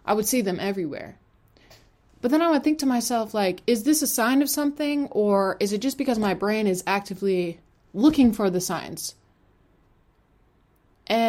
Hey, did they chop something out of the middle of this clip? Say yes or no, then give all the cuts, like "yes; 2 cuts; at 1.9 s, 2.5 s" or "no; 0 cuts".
no; 0 cuts